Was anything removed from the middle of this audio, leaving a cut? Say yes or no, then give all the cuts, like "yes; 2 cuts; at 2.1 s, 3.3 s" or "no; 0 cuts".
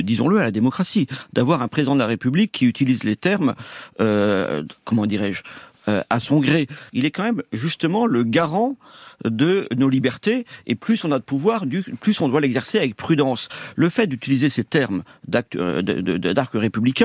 yes; 2 cuts; at 4.8 s, 6.9 s